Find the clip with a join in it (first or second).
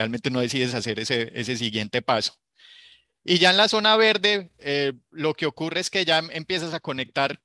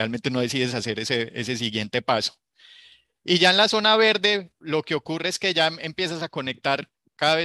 second